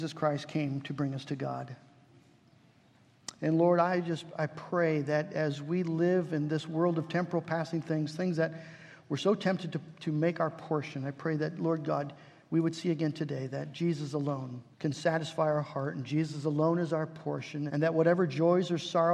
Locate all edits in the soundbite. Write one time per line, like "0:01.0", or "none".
0:14.7
0:17.7